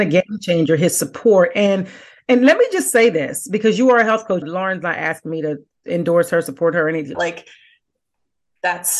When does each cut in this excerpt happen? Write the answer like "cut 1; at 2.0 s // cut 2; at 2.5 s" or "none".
cut 1; at 4.4 s // cut 2; at 7.1 s